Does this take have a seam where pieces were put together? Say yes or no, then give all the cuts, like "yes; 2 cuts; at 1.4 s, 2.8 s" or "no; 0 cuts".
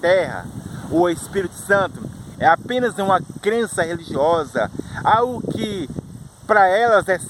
yes; 1 cut; at 2.3 s